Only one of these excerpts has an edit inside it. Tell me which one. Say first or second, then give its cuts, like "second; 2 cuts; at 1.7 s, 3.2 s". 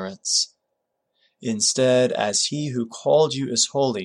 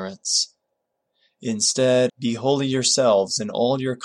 second; 1 cut; at 2.1 s